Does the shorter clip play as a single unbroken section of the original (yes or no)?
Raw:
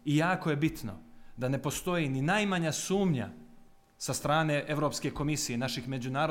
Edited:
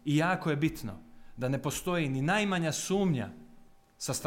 yes